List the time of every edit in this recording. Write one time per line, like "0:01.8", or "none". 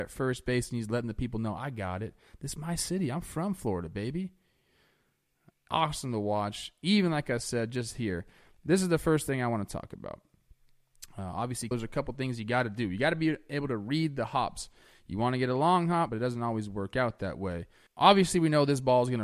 0:11.7
0:16.1
0:17.9